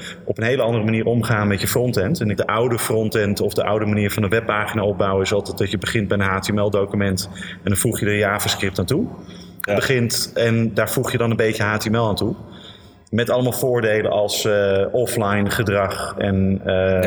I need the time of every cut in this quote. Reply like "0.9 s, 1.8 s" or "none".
2.4 s, 9.7 s